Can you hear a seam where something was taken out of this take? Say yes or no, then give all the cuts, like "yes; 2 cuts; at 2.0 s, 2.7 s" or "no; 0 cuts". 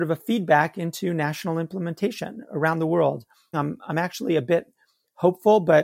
yes; 1 cut; at 3.5 s